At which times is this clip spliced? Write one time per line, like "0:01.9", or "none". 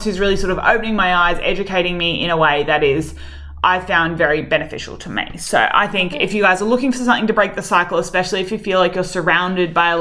none